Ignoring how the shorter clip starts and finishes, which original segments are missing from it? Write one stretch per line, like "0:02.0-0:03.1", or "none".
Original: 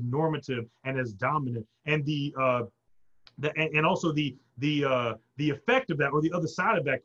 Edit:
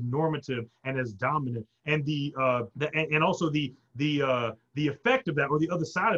0:02.7-0:03.3